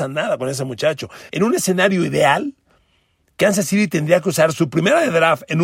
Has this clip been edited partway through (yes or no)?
yes